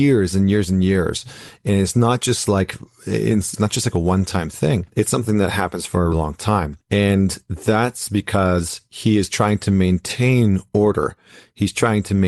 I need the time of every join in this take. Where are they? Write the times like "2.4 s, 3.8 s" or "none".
3.5 s, 6.1 s